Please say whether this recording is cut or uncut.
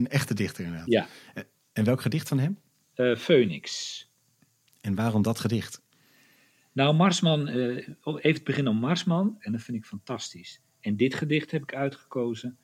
cut